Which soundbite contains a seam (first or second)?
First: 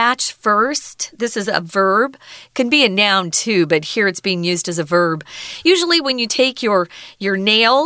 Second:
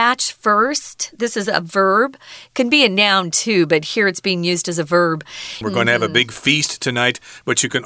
second